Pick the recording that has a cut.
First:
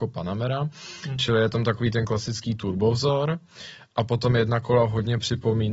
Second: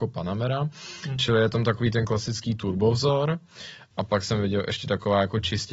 second; 1 cut; at 3.9 s

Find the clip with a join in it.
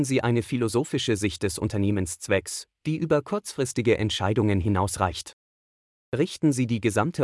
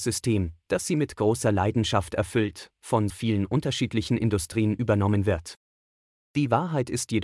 second; 1 cut; at 3.1 s

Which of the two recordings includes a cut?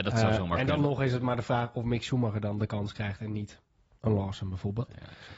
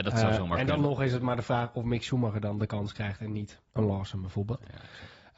second; 1 cut; at 3.7 s

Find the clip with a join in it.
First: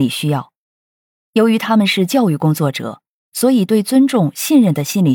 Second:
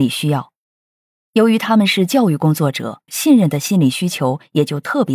second; 1 cut; at 3.1 s

